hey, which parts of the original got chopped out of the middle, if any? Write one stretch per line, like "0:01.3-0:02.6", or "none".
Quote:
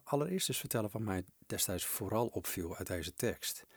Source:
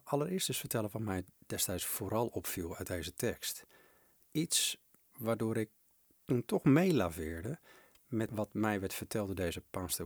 none